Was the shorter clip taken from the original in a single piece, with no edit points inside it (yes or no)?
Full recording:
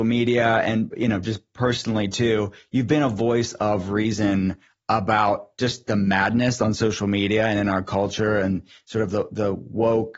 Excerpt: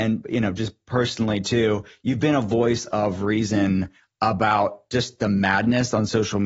yes